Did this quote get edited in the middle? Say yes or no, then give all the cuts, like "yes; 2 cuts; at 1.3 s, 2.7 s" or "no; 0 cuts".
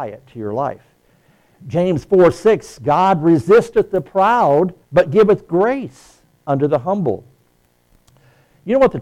yes; 2 cuts; at 1.5 s, 4.8 s